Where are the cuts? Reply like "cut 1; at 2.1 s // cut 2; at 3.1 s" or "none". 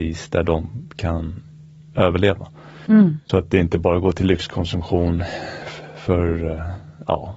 cut 1; at 3.2 s